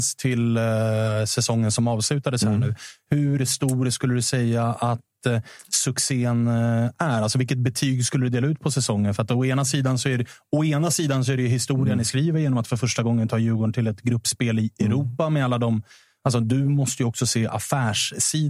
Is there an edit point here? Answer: no; 0 cuts

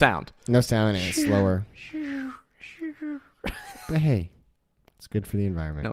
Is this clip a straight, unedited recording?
yes; 0 cuts

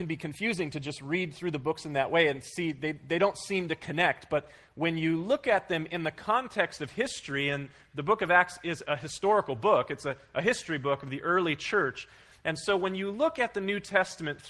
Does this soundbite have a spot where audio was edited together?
no; 0 cuts

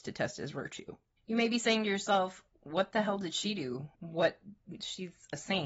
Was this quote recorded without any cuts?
no; 2 cuts; at 1.2 s, 3.9 s

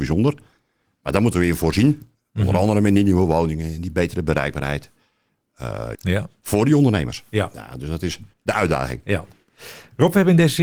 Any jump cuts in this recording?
yes; 2 cuts; at 5.9 s, 8.3 s

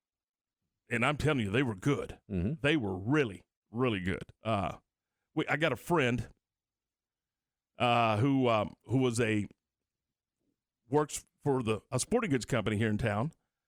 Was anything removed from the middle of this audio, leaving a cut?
yes; 1 cut; at 4.3 s

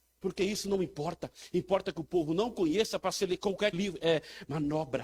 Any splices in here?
yes; 1 cut; at 3.7 s

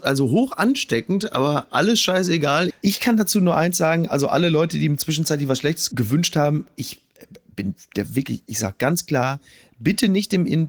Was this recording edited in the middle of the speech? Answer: yes; 1 cut; at 2.7 s

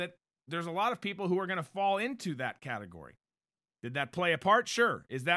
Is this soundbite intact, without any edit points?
no; 1 cut; at 3.7 s

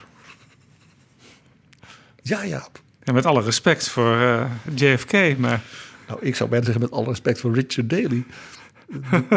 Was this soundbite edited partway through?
no; 0 cuts

